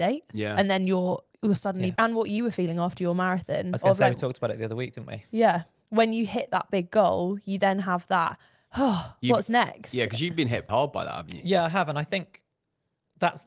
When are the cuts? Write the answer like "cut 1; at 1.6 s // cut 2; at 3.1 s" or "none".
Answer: cut 1; at 2.0 s // cut 2; at 10.7 s